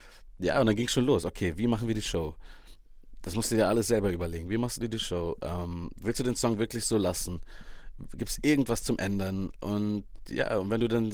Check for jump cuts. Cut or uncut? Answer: uncut